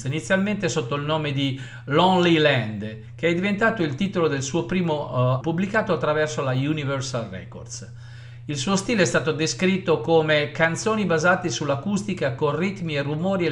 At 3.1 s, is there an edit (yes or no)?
no